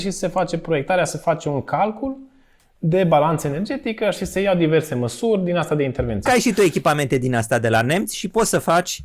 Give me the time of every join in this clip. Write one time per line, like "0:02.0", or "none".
0:06.3